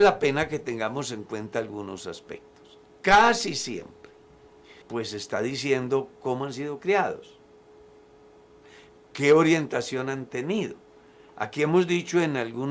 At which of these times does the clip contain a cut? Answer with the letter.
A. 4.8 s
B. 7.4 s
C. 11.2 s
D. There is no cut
A